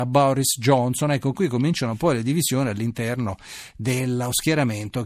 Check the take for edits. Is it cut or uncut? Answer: uncut